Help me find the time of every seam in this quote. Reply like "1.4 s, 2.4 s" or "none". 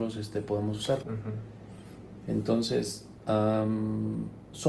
1.0 s